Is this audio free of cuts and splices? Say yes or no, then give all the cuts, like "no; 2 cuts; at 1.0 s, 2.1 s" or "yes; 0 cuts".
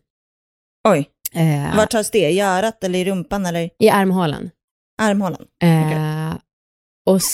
yes; 0 cuts